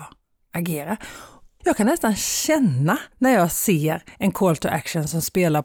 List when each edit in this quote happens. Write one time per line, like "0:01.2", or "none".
0:01.6
0:03.1